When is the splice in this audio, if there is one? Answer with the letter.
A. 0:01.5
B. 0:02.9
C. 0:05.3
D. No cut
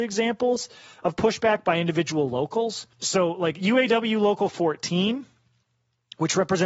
B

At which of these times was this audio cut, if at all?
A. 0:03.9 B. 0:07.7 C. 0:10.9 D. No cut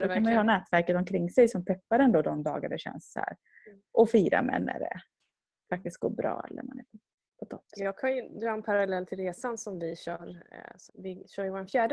C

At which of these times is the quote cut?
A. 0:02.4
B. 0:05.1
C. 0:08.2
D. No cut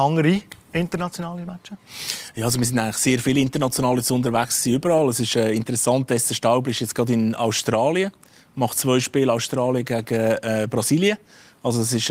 D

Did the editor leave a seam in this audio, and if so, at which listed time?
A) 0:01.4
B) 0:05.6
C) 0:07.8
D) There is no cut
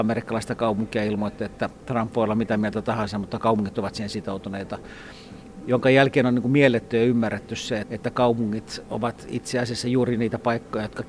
C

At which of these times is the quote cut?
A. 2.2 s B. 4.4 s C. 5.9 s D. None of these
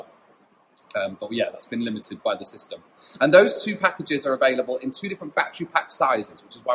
A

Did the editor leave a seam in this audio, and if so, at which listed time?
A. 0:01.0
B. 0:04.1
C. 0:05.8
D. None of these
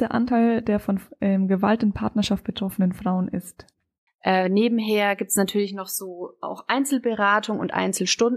B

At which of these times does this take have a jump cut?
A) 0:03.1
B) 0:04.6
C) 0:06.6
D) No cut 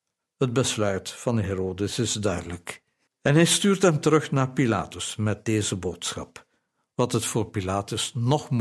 A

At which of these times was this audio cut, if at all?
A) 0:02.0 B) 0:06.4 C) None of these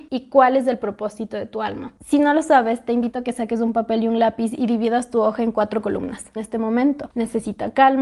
B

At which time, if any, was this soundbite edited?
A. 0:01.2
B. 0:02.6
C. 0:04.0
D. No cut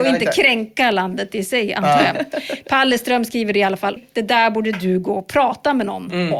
C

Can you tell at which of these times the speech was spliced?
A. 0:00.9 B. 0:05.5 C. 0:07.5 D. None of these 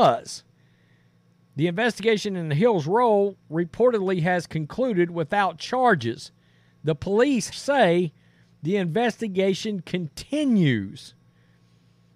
C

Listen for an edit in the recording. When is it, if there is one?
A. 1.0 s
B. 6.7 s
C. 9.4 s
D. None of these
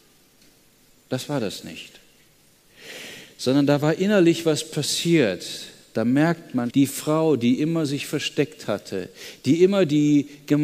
B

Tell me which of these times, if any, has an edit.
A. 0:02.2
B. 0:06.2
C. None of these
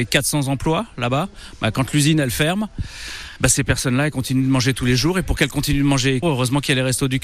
B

